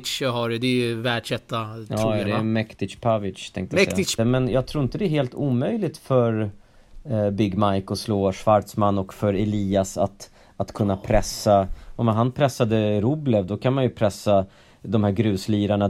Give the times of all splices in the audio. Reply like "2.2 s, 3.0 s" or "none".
4.2 s